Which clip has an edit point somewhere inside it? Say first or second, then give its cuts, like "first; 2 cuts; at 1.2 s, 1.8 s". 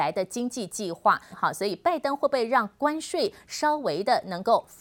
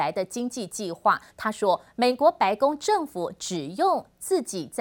first; 1 cut; at 1.3 s